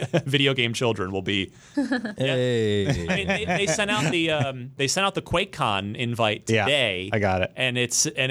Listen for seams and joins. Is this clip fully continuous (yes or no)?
no